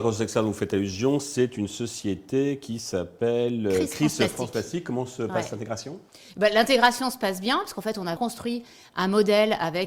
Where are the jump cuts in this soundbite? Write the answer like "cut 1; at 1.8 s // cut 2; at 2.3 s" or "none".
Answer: cut 1; at 8.2 s